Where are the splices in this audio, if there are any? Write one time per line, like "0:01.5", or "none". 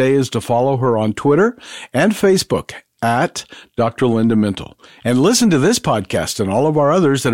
none